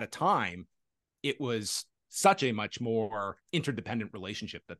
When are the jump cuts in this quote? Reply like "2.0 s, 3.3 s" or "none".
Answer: 3.4 s